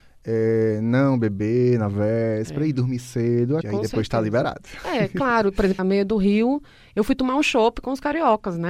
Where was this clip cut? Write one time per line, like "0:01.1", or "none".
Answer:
0:03.6
0:05.8